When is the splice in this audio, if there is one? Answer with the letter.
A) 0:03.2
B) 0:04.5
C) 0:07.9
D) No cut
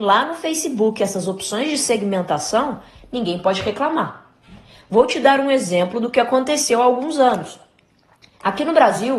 D